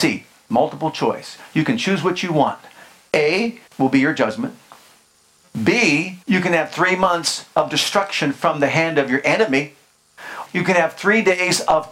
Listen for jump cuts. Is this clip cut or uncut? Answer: cut